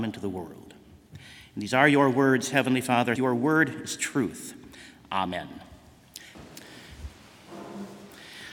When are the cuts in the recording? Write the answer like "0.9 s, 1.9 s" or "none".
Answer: 3.2 s, 6.3 s